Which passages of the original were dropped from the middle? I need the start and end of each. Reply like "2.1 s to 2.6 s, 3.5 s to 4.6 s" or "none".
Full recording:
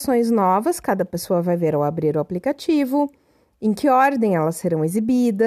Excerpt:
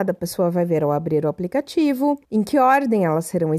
3.2 s to 3.6 s